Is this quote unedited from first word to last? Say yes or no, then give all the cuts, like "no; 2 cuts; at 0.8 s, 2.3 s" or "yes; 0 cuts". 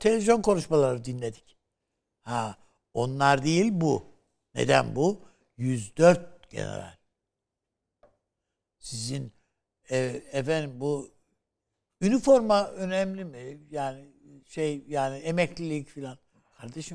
yes; 0 cuts